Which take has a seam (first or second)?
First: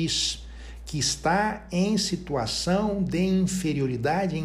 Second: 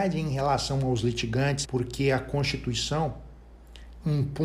second